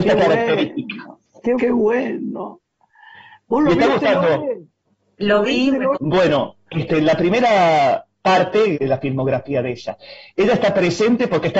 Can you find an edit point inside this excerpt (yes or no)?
yes